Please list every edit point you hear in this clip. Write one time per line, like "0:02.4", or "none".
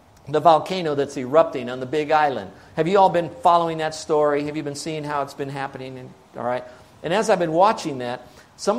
none